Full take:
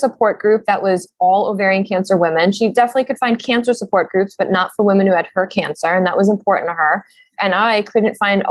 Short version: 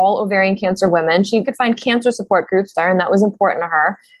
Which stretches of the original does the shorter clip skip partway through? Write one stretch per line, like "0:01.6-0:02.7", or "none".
0:02.7-0:03.1
0:04.4-0:05.8